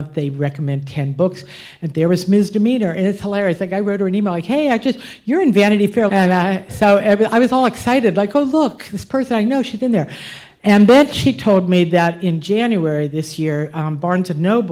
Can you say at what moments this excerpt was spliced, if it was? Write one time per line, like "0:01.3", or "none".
0:06.1